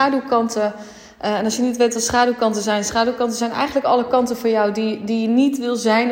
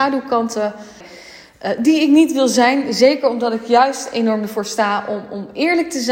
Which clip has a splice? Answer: second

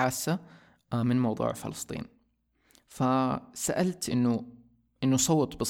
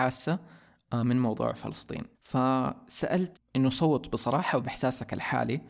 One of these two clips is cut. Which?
second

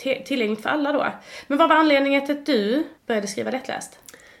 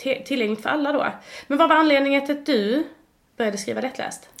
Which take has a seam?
first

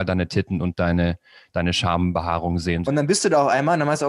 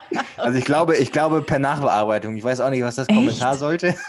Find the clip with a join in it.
first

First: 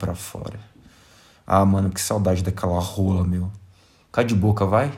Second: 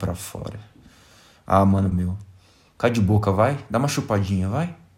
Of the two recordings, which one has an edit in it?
second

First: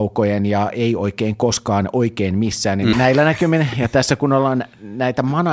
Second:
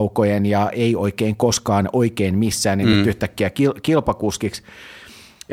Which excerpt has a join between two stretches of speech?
first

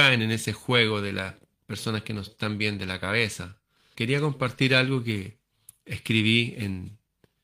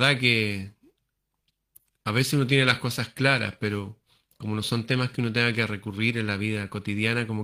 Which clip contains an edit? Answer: first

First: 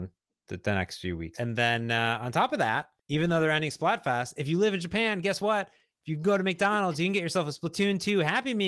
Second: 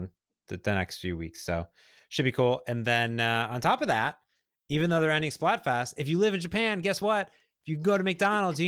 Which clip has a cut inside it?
first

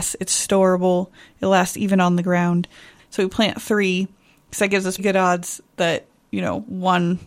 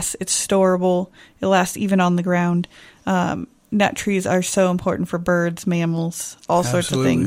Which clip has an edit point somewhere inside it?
first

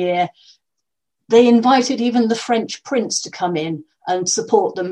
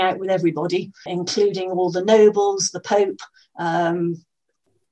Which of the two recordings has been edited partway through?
second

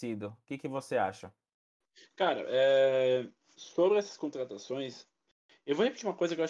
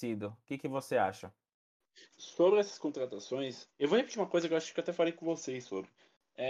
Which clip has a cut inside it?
second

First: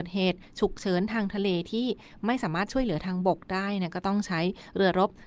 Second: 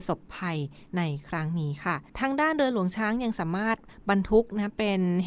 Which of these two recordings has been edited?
second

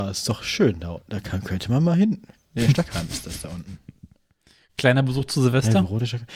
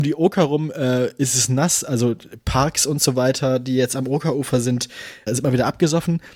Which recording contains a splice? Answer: second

